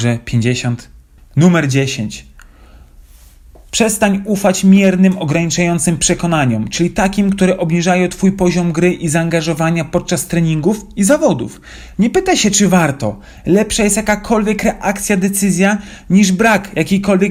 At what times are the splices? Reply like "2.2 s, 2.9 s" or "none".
1.2 s, 11.9 s